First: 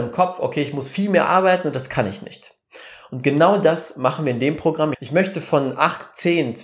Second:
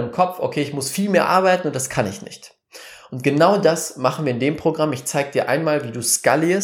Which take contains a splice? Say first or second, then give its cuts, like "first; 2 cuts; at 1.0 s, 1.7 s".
first; 1 cut; at 4.9 s